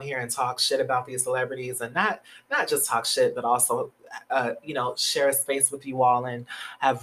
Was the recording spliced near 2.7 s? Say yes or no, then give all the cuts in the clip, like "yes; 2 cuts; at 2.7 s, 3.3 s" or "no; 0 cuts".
no; 0 cuts